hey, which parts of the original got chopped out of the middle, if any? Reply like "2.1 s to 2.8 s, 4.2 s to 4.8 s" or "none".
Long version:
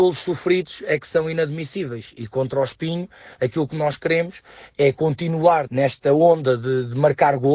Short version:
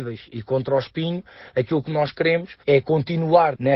4.5 s to 4.7 s